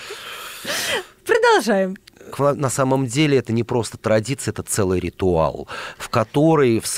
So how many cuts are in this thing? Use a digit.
1